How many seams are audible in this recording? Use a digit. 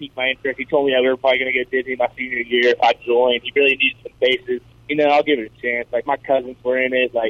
1